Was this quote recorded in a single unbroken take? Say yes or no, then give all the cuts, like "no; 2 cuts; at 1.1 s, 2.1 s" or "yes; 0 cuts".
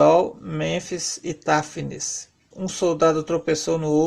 no; 1 cut; at 2.5 s